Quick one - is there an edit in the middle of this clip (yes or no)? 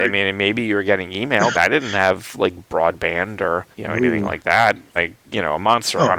yes